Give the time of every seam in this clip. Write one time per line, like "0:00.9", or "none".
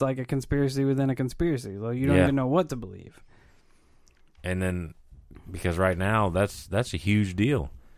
none